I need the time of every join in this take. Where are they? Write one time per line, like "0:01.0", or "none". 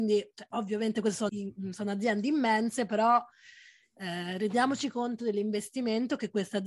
0:01.3

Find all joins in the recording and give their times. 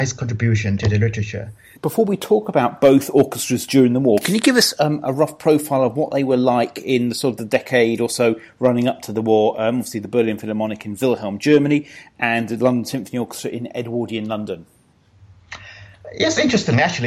0:01.8

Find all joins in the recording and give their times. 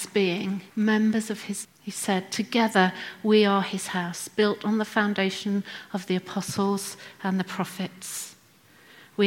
0:01.6

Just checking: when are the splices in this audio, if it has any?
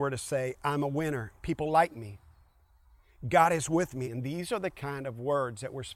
0:04.0

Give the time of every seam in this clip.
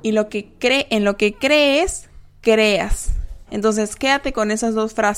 none

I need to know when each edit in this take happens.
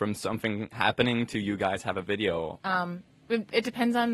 0:02.6

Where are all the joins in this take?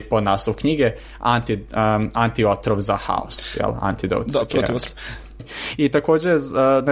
0:05.4

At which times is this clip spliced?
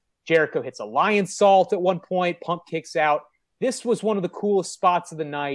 none

